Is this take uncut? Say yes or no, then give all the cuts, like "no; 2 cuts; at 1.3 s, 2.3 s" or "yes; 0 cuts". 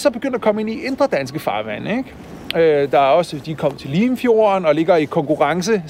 yes; 0 cuts